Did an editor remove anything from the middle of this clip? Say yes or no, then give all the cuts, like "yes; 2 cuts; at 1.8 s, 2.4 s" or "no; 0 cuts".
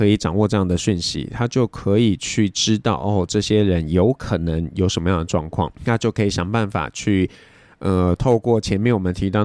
yes; 1 cut; at 5.8 s